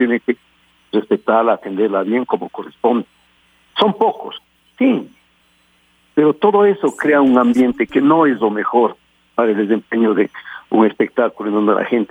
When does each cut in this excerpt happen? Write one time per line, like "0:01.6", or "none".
0:03.7